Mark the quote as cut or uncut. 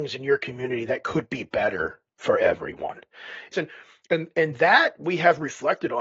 cut